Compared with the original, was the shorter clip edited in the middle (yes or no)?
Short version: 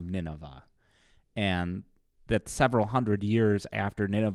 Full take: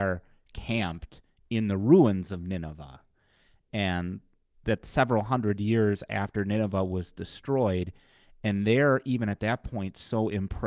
no